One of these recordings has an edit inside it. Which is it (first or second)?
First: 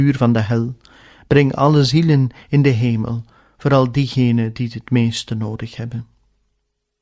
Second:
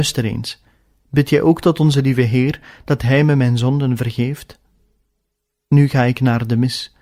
second